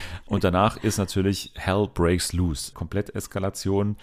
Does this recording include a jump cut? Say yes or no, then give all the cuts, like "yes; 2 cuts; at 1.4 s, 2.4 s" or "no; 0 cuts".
yes; 1 cut; at 2.7 s